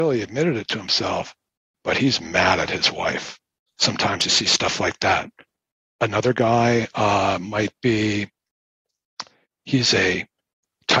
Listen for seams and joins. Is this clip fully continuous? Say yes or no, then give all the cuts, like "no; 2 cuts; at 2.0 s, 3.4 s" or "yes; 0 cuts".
no; 1 cut; at 3.7 s